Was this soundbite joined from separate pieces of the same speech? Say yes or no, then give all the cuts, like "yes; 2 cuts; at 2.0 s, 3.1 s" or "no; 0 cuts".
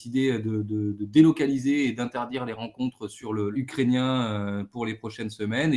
yes; 1 cut; at 3.5 s